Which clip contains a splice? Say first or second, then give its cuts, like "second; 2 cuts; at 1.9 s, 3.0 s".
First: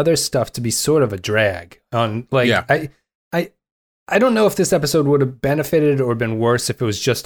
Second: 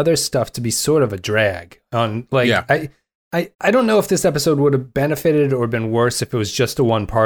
second; 1 cut; at 3.5 s